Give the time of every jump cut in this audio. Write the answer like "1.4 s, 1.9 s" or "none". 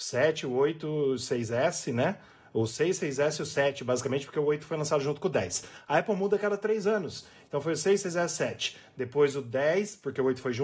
none